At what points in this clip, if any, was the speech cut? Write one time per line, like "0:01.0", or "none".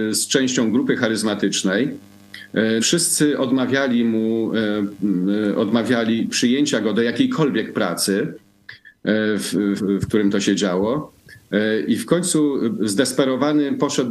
0:02.8
0:09.8